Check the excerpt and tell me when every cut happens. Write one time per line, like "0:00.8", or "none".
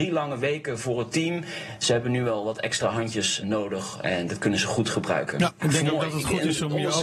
0:03.4